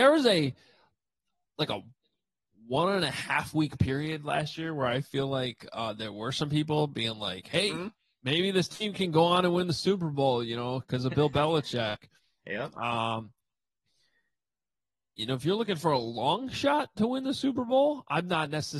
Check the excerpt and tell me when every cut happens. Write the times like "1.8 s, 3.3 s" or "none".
none